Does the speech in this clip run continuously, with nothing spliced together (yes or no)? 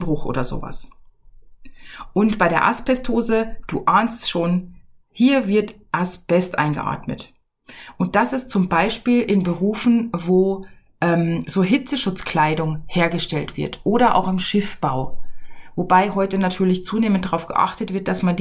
yes